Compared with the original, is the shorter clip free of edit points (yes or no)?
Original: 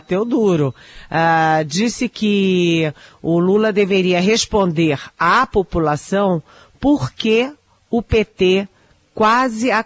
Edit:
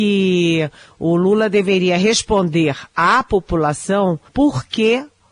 no